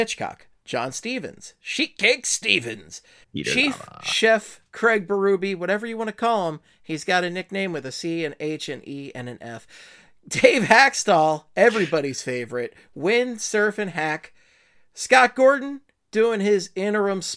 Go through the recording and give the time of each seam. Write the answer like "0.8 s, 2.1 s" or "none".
3.2 s